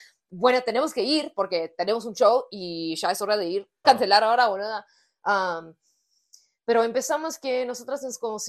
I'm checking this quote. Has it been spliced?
yes; 1 cut; at 3.8 s

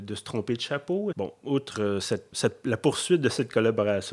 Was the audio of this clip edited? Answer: yes; 2 cuts; at 1.1 s, 2.3 s

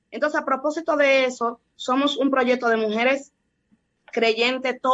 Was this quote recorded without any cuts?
yes; 0 cuts

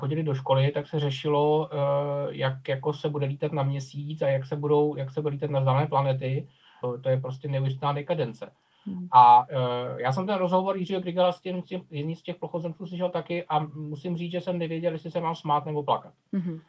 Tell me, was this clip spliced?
yes; 1 cut; at 6.8 s

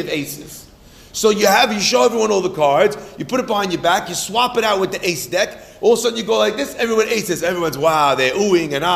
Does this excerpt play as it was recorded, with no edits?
yes; 0 cuts

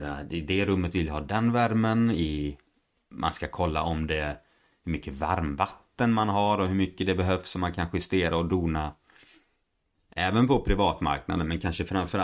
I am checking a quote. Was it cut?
yes; 1 cut; at 9.9 s

